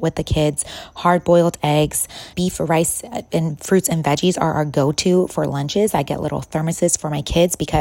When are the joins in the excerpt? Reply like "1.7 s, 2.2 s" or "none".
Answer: 2.3 s